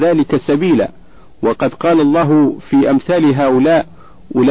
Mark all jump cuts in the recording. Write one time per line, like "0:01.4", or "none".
none